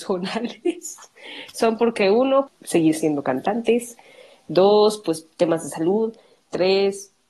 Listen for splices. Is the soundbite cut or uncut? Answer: cut